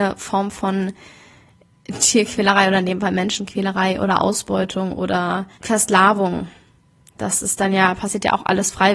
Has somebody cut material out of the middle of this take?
yes; 1 cut; at 5.5 s

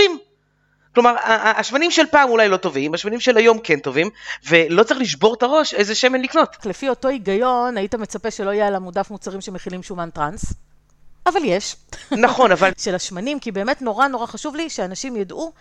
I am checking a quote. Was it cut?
yes; 1 cut; at 12.7 s

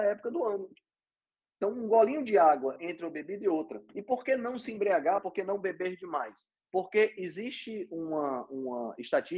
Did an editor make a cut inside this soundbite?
no; 0 cuts

